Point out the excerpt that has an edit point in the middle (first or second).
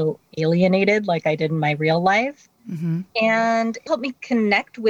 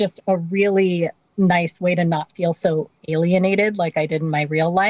first